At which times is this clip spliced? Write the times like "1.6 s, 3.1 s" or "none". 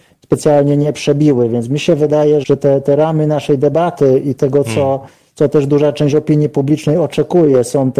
2.4 s